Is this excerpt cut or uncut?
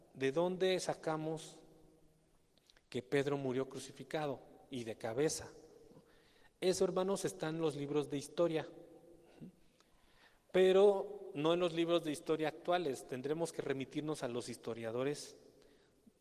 uncut